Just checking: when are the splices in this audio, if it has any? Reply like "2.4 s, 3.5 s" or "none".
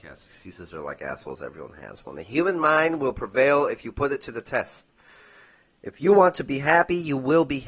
none